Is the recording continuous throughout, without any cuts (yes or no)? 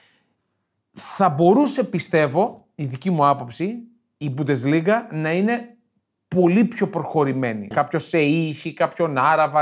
no